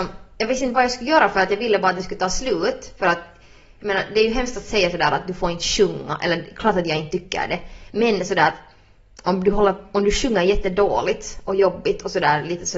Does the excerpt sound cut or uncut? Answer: uncut